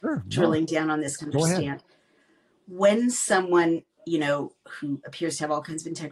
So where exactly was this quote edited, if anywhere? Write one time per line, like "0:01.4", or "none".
0:01.2
0:04.0